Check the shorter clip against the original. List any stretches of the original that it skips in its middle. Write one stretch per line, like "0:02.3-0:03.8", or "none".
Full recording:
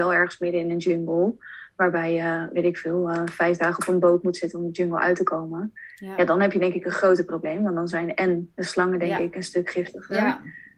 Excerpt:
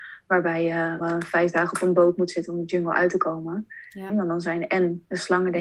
0:02.5-0:03.1
0:06.2-0:07.6

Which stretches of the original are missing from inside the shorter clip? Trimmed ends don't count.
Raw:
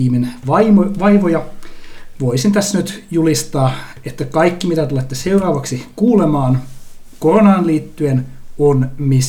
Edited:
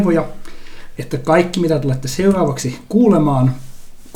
0:02.1-0:04.0

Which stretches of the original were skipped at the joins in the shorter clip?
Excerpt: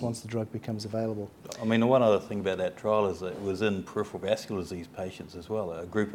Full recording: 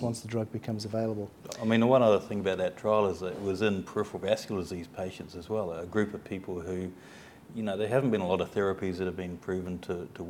none

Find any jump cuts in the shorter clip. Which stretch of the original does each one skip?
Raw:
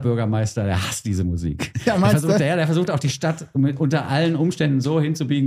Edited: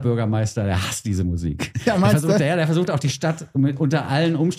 none

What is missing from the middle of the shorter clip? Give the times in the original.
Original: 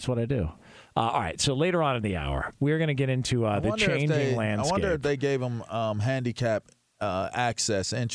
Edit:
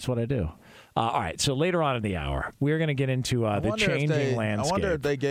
none

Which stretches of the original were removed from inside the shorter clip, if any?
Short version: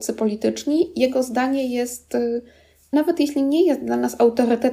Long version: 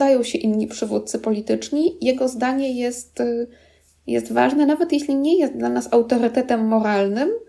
0:04.0-0:04.7

